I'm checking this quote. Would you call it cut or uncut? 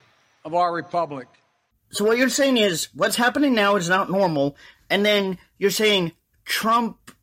cut